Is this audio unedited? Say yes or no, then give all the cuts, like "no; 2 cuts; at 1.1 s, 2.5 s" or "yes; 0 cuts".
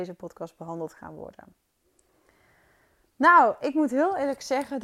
yes; 0 cuts